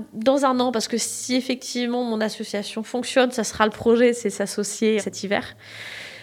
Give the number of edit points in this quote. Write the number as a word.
one